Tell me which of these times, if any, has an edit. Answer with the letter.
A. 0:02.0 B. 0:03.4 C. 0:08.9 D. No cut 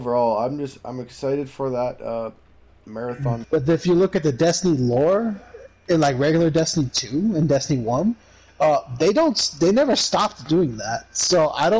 B